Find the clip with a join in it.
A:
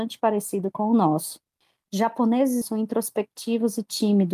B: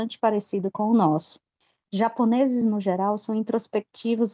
A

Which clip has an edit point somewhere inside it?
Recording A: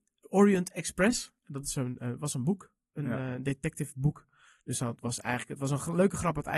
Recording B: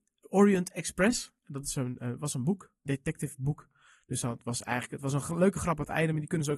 B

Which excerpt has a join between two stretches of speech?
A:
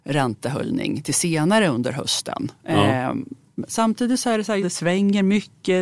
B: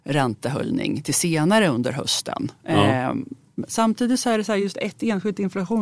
A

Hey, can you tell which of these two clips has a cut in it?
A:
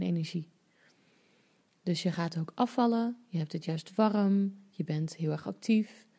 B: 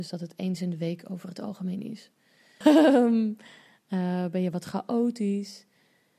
B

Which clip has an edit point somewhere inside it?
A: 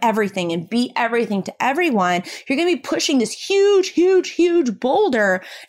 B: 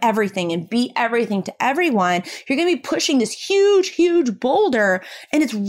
B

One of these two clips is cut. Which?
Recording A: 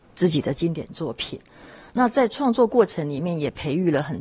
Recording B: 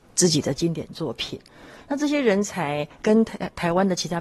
B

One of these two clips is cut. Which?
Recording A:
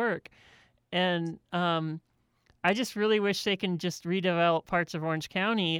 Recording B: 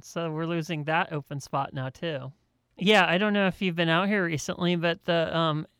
B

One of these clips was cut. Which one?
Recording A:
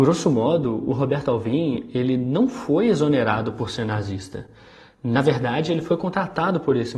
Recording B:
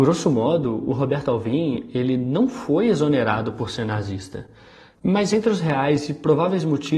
B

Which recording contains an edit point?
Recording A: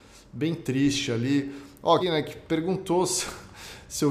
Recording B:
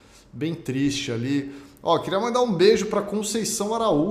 A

